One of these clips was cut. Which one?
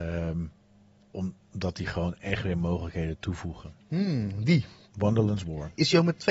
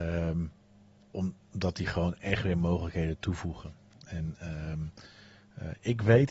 first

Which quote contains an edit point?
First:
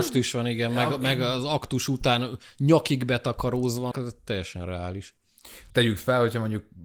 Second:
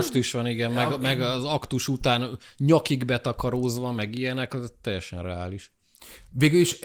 first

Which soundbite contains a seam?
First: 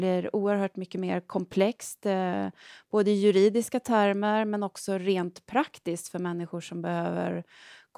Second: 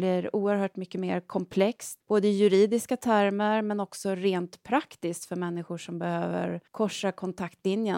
second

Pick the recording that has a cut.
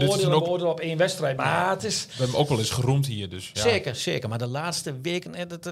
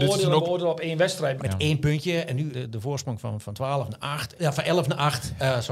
second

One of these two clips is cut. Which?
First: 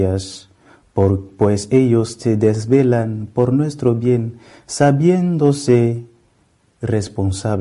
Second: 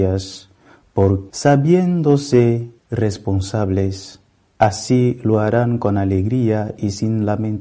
second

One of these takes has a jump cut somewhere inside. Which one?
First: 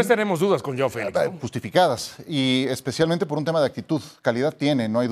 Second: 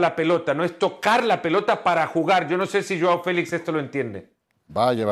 first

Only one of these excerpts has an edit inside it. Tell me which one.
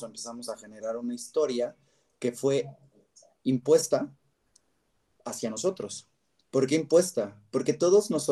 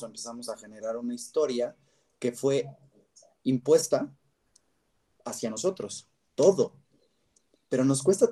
second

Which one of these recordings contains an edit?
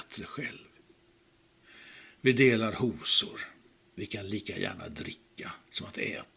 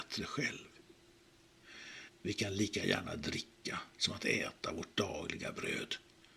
second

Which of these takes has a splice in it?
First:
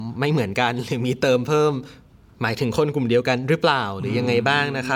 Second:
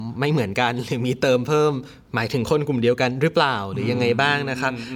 second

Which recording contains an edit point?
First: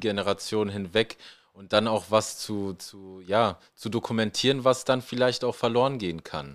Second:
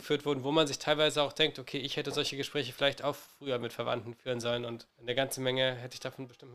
second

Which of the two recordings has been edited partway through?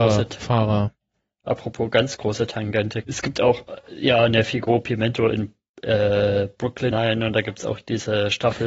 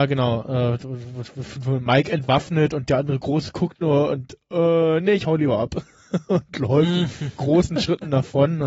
first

